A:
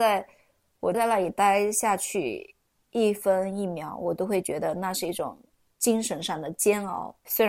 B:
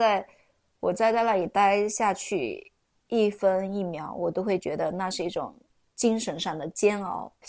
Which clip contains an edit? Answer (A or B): A